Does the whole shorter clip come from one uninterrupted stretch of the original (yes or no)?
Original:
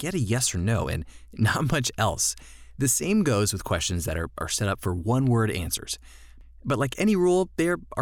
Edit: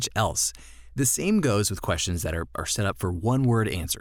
yes